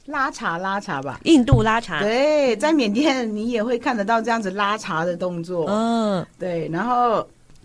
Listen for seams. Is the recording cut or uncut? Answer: uncut